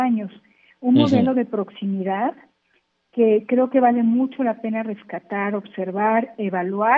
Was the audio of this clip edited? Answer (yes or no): no